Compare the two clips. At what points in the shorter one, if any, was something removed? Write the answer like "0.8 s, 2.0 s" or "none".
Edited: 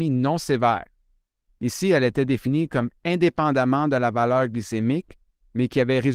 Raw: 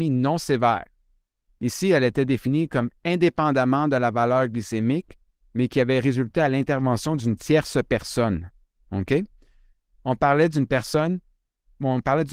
none

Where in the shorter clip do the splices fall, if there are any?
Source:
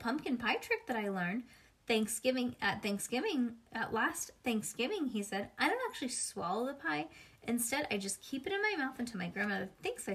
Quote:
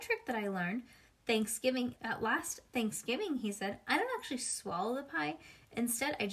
2.0 s

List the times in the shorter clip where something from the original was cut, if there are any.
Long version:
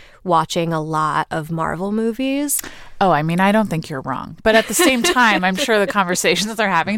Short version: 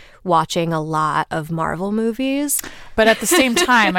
2.9 s

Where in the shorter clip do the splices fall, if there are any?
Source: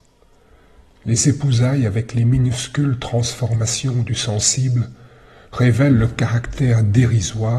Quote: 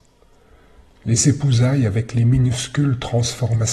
none

